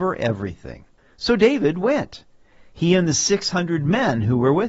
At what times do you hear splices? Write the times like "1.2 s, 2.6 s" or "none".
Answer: 1.0 s

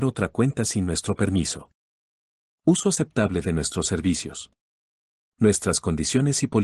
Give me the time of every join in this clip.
2.4 s

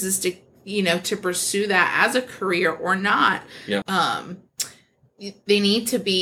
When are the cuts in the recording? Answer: 3.8 s

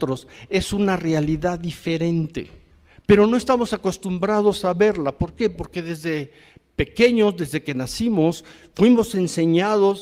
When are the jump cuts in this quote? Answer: none

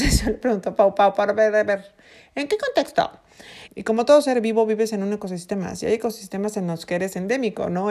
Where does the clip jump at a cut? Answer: 3.7 s

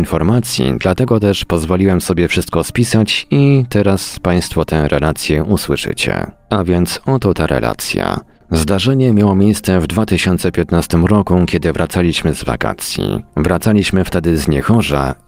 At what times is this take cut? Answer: none

